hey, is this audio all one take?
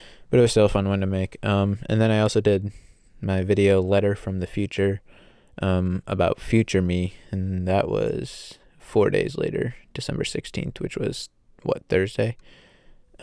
yes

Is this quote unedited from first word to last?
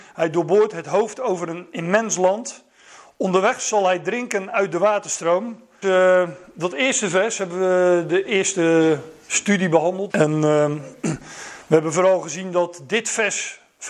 no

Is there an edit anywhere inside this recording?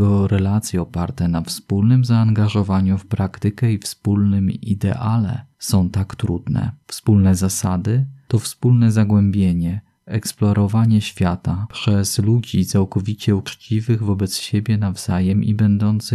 yes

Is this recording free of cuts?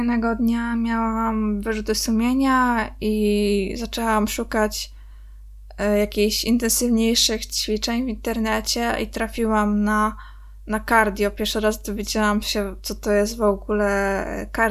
yes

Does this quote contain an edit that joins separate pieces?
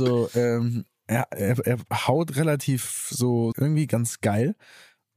yes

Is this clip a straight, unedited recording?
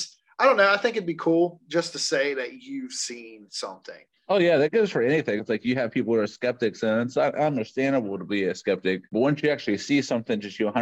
no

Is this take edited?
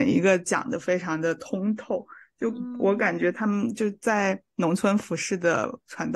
no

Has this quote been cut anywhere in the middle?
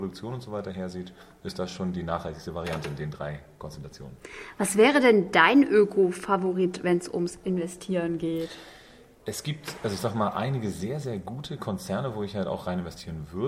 no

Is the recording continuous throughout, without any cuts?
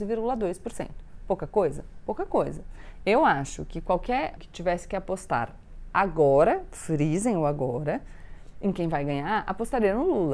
no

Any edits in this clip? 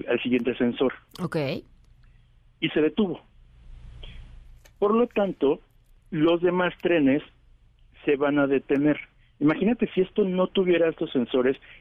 no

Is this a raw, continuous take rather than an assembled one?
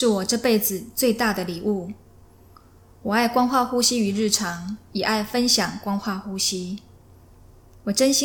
yes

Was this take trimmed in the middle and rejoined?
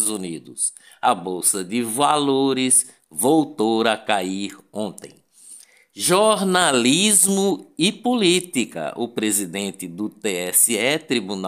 no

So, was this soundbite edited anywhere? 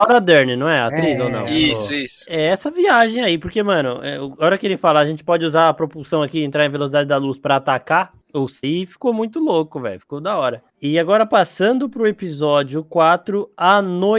yes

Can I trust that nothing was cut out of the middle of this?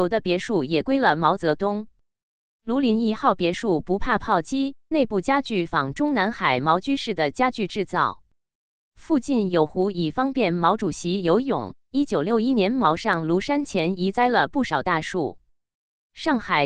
yes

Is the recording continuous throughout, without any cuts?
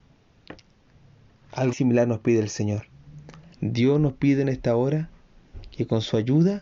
no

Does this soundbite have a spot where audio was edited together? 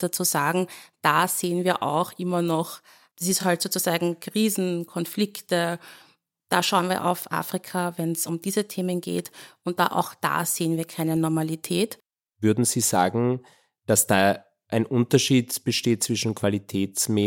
no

